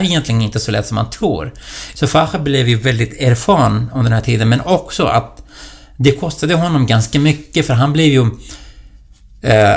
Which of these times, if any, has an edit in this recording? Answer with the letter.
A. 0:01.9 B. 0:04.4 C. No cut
A